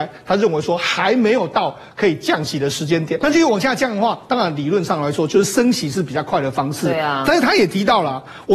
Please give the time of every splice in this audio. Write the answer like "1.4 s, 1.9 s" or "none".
3.2 s